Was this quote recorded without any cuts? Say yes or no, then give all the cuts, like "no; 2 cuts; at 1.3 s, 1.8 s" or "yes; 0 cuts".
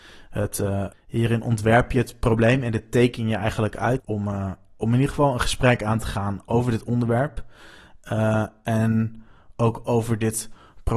no; 2 cuts; at 0.9 s, 4.0 s